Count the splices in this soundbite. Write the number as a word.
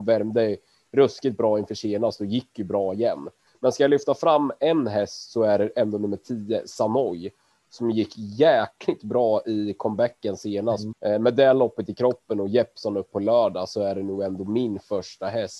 two